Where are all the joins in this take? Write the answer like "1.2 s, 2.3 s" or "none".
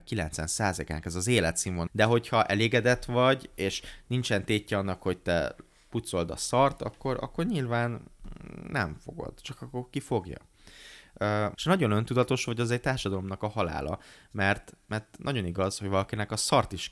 1.9 s, 11.6 s